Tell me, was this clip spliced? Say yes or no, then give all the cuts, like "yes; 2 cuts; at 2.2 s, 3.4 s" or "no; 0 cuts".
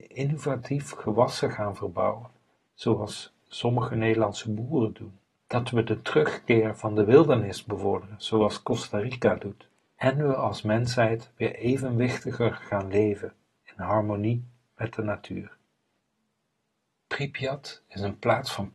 no; 0 cuts